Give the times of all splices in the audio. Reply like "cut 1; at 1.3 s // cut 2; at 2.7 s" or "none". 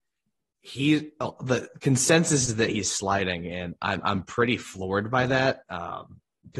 none